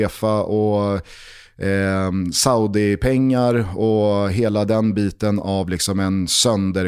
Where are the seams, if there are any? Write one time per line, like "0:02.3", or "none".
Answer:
none